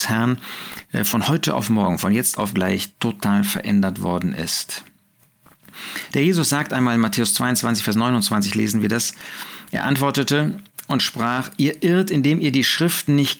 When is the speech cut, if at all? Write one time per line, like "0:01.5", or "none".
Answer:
none